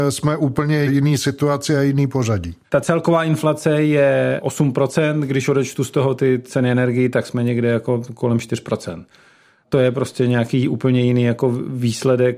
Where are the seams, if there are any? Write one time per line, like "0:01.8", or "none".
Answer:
0:02.6